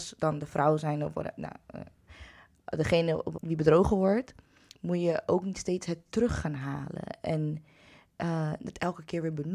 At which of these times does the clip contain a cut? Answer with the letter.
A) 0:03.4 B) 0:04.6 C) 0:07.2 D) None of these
A